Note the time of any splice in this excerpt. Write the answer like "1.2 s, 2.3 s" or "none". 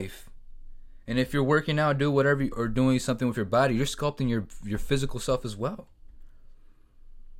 2.5 s